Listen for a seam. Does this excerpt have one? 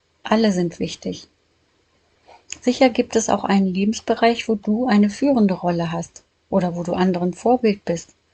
no; 0 cuts

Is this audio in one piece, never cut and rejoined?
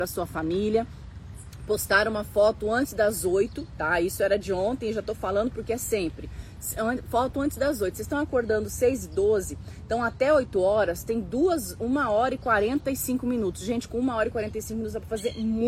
yes; 0 cuts

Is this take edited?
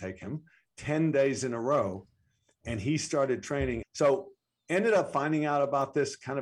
yes; 1 cut; at 3.8 s

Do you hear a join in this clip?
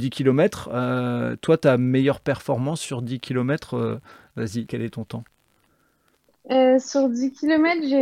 yes; 1 cut; at 4.7 s

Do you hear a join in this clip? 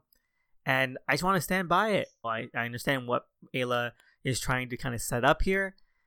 yes; 1 cut; at 2.2 s

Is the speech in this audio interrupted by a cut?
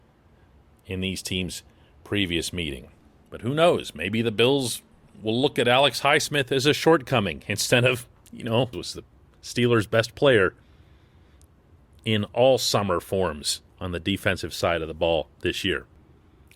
yes; 2 cuts; at 8.7 s, 13.7 s

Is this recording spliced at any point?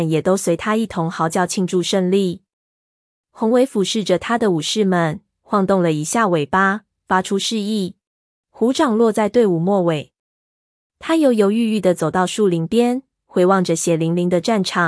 yes; 1 cut; at 8.4 s

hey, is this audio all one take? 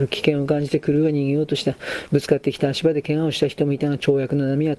no; 1 cut; at 2.1 s

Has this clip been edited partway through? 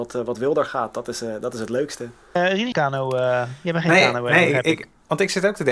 yes; 1 cut; at 2.7 s

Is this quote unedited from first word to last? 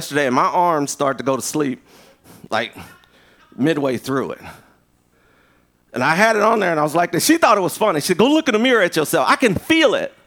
yes; 0 cuts

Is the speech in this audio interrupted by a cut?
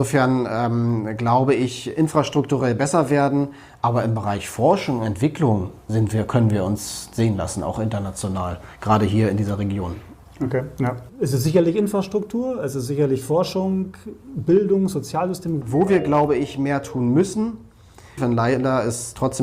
yes; 3 cuts; at 11.1 s, 15.6 s, 18.2 s

